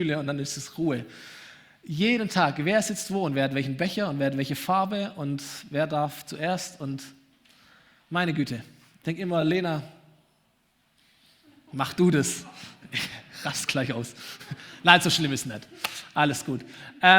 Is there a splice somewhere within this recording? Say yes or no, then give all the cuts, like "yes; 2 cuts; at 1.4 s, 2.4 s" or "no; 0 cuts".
no; 0 cuts